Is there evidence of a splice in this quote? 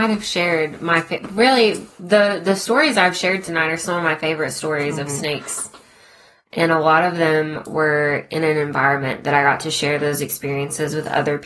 no; 0 cuts

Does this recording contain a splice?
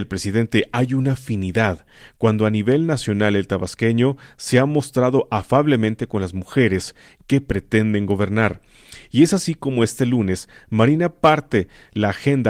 no; 0 cuts

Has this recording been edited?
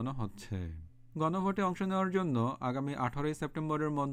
yes; 1 cut; at 1.1 s

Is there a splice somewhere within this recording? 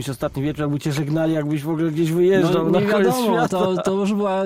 no; 0 cuts

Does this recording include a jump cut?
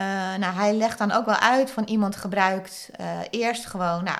no; 0 cuts

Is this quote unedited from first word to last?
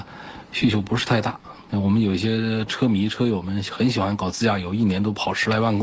yes; 0 cuts

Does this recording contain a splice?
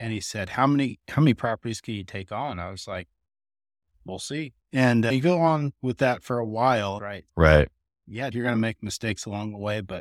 yes; 3 cuts; at 4.6 s, 7.0 s, 8.3 s

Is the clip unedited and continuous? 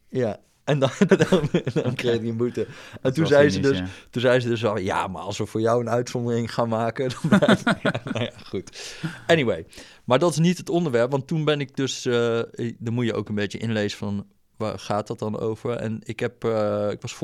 no; 1 cut; at 1.1 s

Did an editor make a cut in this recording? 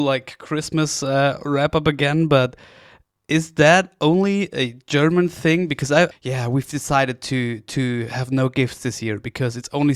yes; 1 cut; at 6.1 s

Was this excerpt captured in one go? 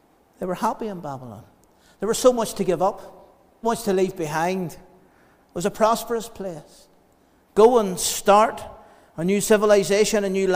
no; 1 cut; at 3.6 s

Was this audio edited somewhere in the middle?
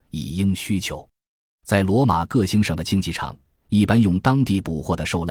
no; 0 cuts

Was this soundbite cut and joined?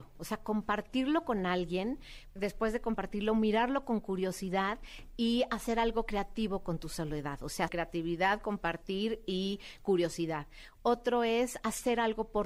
yes; 2 cuts; at 2.4 s, 7.7 s

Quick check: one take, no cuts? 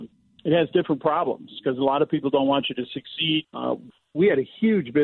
no; 1 cut; at 3.4 s

